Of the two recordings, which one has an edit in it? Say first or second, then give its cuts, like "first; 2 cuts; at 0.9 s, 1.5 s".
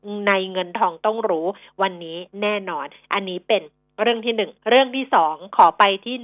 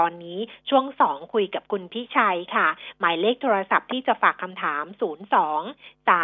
first; 1 cut; at 4.6 s